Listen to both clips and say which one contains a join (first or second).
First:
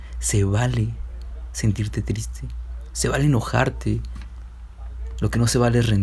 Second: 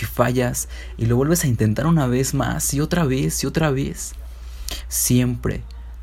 second